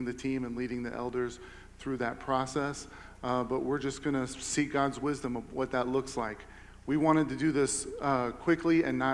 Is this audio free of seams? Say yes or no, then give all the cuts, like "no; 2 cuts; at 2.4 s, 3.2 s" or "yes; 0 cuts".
yes; 0 cuts